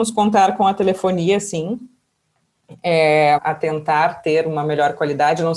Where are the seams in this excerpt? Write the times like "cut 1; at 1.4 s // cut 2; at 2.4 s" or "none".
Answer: cut 1; at 3.4 s